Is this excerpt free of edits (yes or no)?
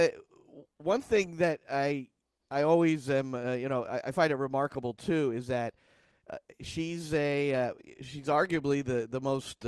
yes